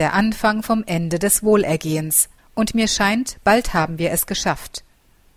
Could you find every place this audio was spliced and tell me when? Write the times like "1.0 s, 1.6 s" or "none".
2.4 s